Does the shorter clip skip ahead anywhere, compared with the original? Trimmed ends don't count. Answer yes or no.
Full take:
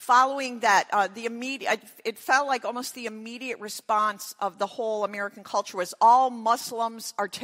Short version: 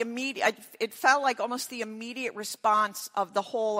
no